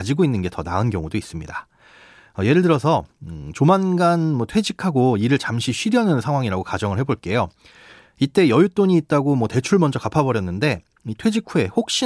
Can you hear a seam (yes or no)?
no